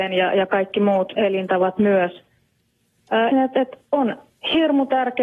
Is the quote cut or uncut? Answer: cut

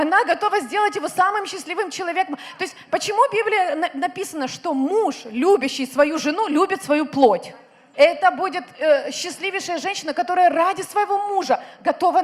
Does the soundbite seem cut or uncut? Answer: cut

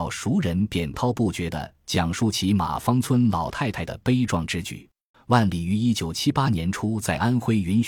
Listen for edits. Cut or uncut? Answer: cut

